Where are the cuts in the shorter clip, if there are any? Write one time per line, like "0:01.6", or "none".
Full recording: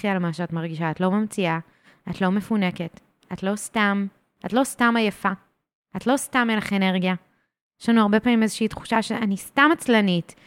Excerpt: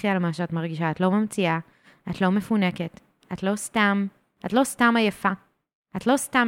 none

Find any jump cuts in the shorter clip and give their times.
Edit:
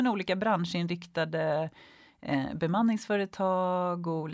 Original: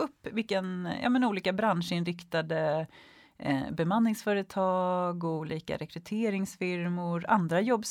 none

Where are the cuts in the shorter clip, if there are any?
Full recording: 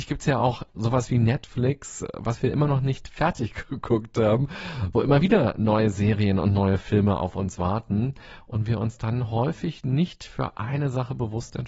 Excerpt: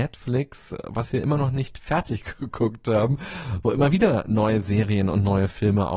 none

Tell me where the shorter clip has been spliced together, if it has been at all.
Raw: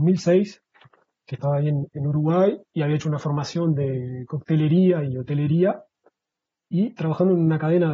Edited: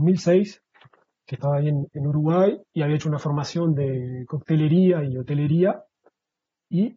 none

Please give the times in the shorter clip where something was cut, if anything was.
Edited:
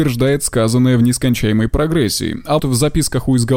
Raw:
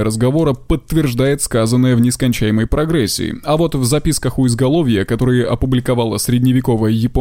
0:02.6

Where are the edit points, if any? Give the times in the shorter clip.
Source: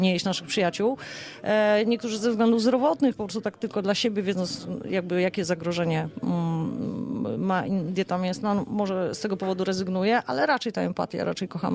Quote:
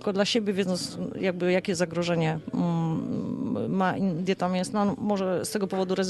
none

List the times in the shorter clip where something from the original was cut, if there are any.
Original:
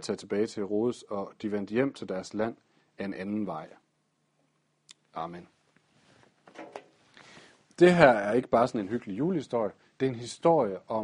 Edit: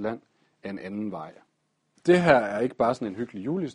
0:01.9

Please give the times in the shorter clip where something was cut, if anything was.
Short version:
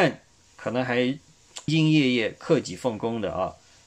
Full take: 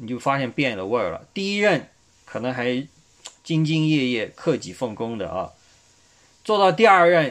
0:01.7

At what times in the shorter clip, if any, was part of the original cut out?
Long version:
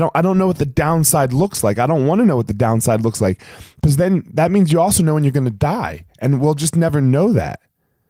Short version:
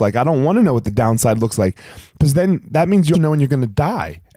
0:03.1

